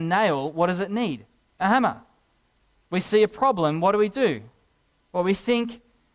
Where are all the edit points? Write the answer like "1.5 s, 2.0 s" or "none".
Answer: none